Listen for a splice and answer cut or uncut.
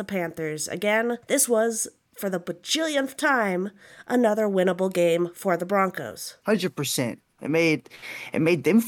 cut